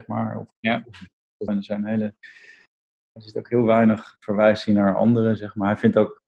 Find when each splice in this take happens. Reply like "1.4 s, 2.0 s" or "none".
1.5 s